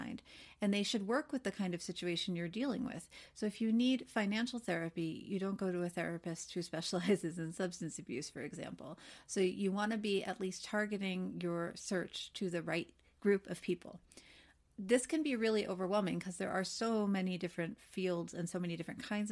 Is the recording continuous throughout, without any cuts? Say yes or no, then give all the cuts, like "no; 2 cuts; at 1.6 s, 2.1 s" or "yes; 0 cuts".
yes; 0 cuts